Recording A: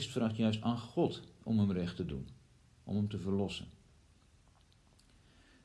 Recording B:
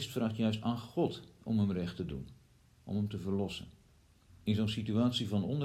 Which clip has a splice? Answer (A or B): B